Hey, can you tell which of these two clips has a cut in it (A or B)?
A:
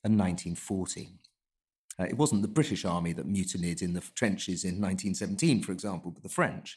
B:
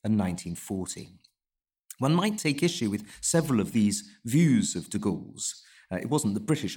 A